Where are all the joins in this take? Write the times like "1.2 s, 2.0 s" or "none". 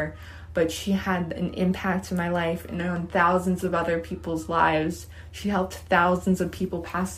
none